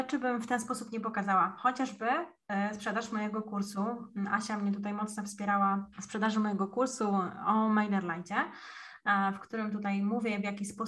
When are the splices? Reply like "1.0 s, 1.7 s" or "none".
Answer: 5.9 s